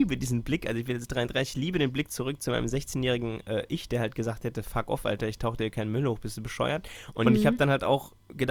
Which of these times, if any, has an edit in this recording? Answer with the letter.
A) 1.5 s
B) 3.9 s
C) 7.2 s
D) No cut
C